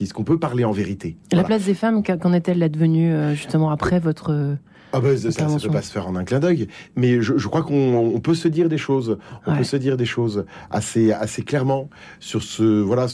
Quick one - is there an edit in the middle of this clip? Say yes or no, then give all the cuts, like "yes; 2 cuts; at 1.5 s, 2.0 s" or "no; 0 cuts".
no; 0 cuts